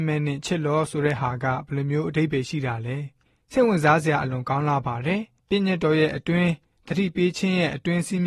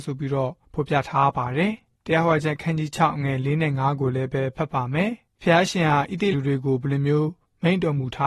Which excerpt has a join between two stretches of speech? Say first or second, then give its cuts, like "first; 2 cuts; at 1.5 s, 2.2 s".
second; 1 cut; at 6.3 s